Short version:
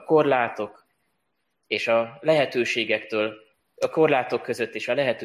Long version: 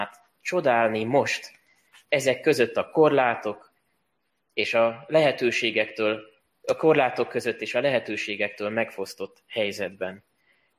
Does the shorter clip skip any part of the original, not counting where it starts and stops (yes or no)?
no